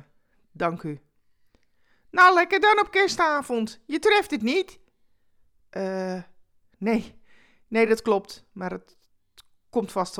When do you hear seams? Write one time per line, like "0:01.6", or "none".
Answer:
none